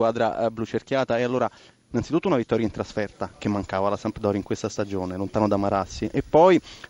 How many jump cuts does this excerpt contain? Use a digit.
0